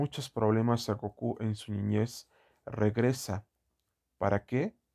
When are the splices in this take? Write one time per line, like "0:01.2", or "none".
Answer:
none